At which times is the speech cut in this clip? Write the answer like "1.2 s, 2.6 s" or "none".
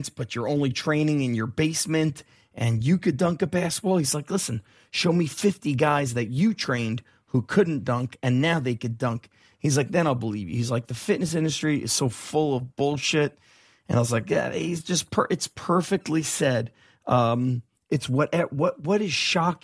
none